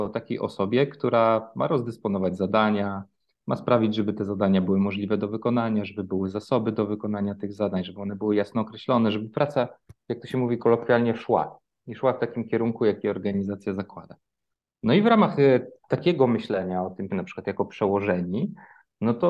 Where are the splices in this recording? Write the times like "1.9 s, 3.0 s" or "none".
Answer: 17.1 s